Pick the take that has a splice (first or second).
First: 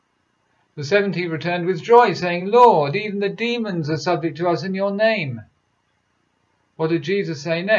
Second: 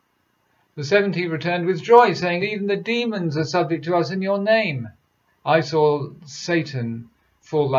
second